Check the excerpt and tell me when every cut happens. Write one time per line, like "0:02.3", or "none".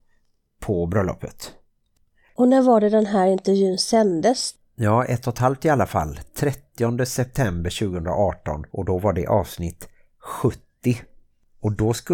0:04.6
0:08.7

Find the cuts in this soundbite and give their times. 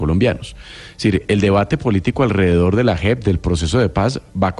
none

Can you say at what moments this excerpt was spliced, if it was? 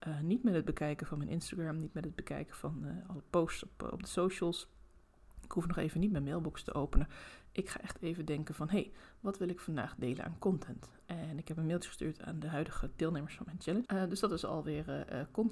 0:11.0
0:13.8

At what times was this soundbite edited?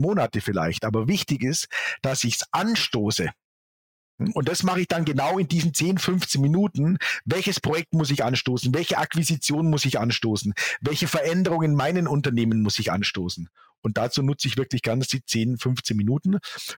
none

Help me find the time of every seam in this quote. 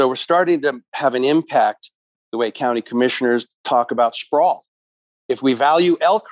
none

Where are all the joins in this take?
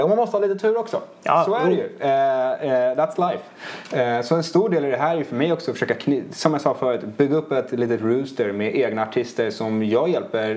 none

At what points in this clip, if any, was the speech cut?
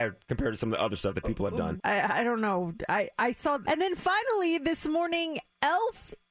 0:01.8
0:03.6

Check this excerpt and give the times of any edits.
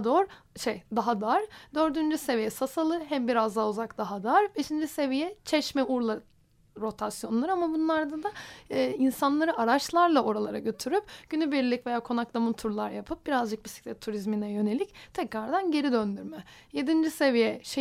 none

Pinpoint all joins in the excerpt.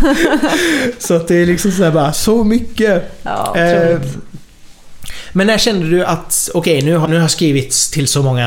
0:07.0

